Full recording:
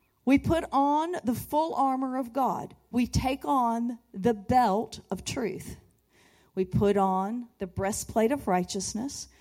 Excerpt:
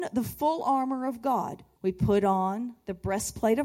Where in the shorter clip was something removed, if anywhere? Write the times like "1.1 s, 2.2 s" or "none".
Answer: 1.8 s